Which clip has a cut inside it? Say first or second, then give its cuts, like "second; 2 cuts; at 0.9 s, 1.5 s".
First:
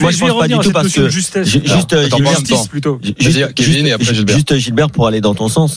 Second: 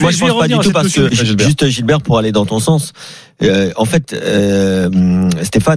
second; 1 cut; at 1.1 s